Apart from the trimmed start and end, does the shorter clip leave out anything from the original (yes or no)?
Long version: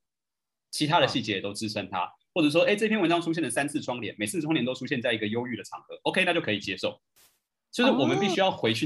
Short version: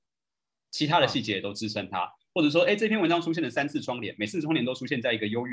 no